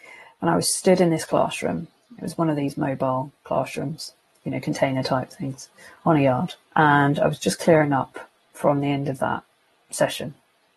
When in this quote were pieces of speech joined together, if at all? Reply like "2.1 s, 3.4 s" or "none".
4.3 s, 6.6 s